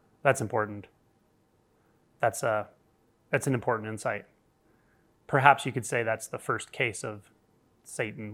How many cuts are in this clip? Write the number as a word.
zero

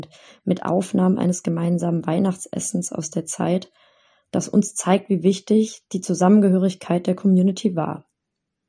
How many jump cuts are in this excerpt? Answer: zero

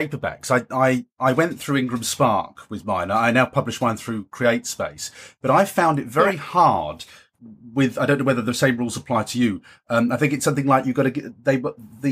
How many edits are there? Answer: zero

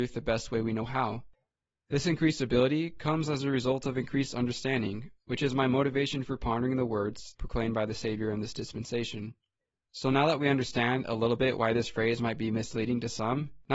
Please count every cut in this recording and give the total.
one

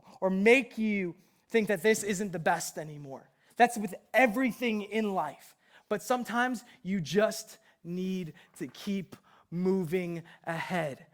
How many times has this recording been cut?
zero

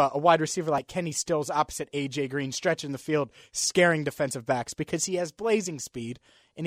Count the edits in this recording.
zero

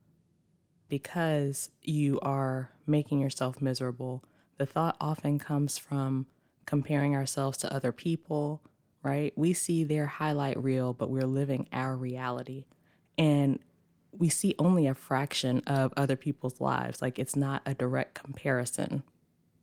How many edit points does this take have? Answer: one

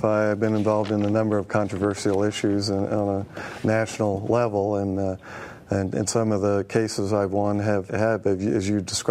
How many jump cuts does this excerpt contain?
one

